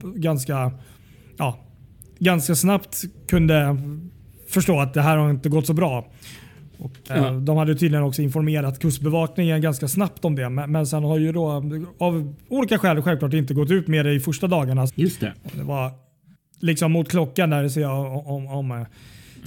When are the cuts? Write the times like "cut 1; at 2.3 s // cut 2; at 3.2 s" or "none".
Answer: cut 1; at 7.1 s // cut 2; at 14.9 s